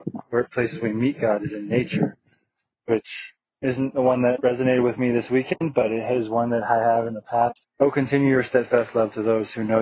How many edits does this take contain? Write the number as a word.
one